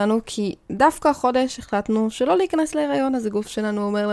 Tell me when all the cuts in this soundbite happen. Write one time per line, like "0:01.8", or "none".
none